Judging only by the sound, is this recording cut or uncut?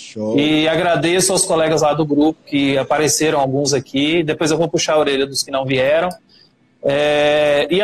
uncut